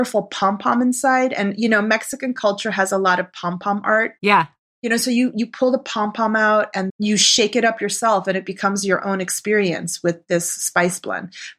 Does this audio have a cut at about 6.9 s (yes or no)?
yes